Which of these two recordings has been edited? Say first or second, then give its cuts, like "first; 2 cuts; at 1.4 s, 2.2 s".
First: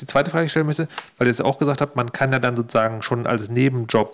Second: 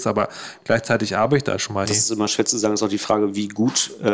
second; 1 cut; at 1.8 s